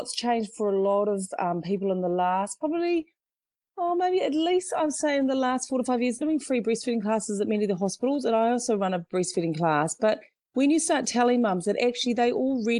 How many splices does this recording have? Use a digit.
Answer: 1